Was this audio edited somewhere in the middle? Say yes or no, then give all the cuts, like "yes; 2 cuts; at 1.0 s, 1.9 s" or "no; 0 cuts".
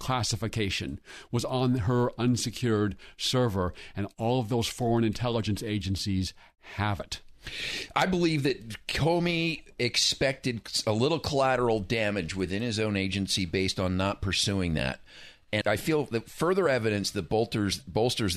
yes; 1 cut; at 15.6 s